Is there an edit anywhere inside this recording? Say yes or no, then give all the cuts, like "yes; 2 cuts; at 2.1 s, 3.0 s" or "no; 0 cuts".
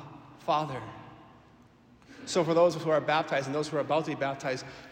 no; 0 cuts